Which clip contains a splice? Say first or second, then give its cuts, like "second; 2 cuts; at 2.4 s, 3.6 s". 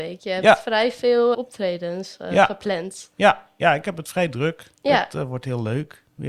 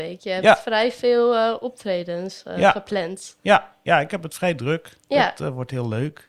first; 1 cut; at 1.3 s